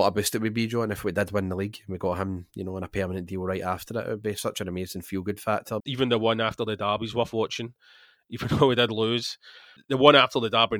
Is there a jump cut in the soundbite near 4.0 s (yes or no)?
no